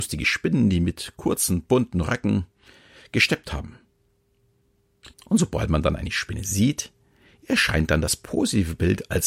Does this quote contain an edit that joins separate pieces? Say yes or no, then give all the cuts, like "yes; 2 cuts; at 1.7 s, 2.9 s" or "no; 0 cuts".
yes; 1 cut; at 5.1 s